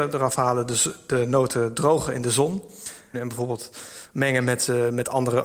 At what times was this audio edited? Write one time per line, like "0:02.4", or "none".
0:03.1